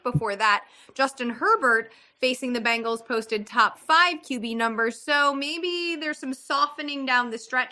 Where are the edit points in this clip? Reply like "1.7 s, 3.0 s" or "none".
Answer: none